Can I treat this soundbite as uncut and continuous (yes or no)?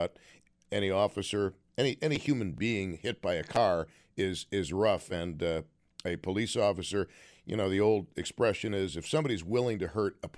yes